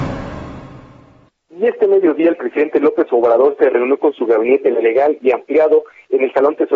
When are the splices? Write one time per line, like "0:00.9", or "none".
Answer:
none